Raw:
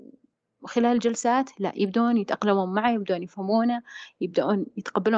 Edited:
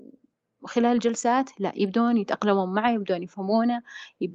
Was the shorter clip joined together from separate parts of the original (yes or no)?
no